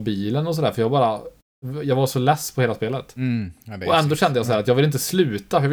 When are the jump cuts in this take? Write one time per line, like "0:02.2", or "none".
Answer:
none